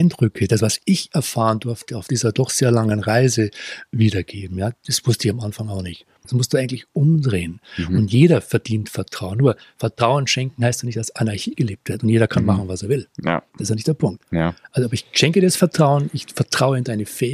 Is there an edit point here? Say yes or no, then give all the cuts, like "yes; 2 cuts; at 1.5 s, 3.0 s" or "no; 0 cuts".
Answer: yes; 1 cut; at 6.2 s